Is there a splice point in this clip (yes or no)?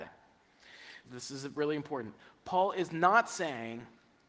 yes